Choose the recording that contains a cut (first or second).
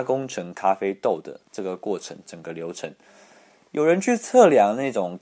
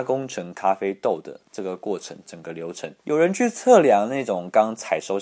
second